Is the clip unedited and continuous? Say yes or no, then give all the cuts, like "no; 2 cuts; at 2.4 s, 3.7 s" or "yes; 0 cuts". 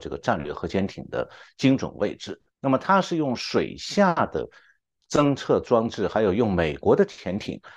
no; 1 cut; at 2.5 s